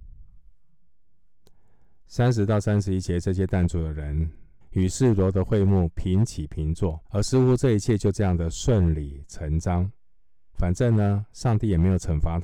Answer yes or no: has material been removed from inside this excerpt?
yes